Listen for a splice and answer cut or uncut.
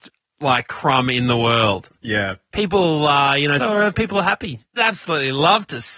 cut